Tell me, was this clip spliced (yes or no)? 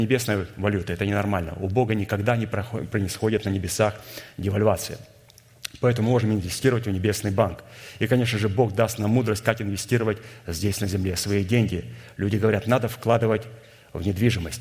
no